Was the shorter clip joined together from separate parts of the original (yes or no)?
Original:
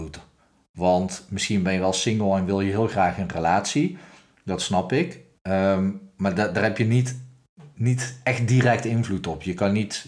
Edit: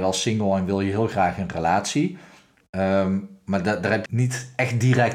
yes